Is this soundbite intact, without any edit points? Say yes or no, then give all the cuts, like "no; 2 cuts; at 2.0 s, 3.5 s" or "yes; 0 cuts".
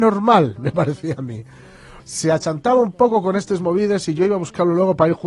no; 1 cut; at 2.0 s